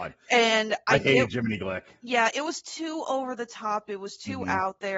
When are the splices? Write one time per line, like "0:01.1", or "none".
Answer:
none